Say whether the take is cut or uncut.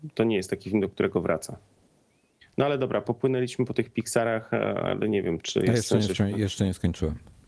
cut